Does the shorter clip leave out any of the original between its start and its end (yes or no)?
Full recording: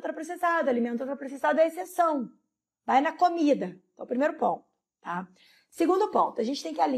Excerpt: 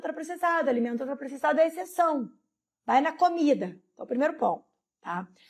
no